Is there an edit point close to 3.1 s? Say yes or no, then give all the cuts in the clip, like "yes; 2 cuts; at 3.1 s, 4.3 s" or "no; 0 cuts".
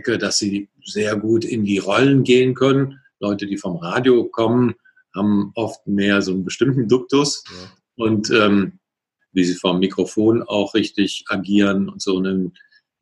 no; 2 cuts; at 7.5 s, 9.2 s